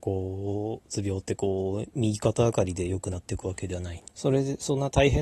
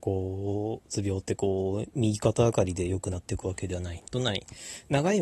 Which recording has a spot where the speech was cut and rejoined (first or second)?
first